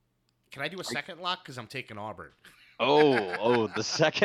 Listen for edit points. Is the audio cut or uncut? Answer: uncut